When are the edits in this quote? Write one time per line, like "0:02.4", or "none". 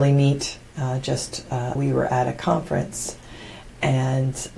0:01.8